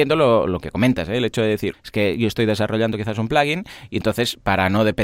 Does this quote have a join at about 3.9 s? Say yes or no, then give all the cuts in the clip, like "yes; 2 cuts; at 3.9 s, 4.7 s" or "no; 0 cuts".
no; 1 cut; at 1.7 s